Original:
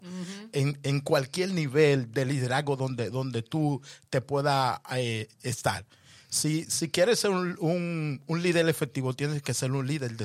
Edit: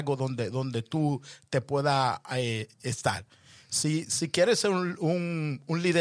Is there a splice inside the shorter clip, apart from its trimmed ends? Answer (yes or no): no